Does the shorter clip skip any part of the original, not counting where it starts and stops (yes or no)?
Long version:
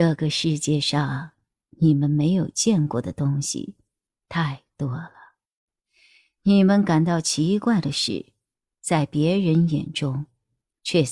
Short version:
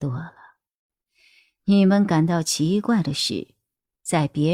no